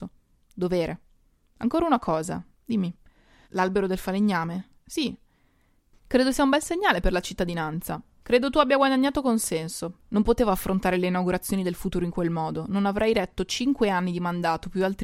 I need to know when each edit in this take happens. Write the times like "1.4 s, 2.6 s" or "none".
3.4 s, 8.2 s, 10.0 s